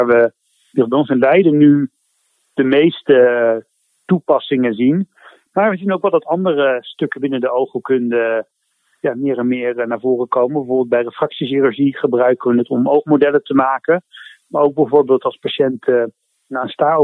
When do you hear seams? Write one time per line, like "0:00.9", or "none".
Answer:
none